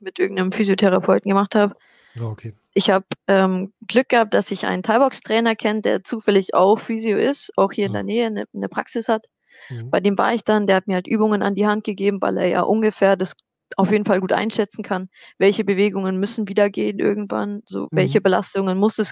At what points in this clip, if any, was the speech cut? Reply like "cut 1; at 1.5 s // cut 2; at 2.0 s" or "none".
none